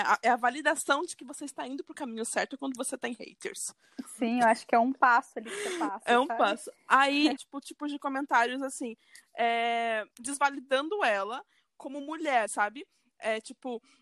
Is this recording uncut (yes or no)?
no